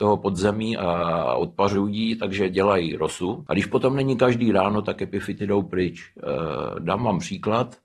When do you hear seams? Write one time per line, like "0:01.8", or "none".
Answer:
none